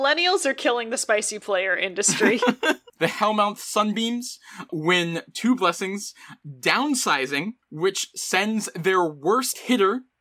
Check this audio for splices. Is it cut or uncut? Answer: cut